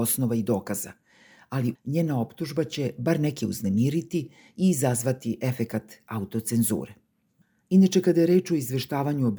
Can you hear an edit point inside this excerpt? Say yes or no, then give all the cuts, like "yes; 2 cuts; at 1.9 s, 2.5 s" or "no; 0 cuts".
yes; 1 cut; at 1.7 s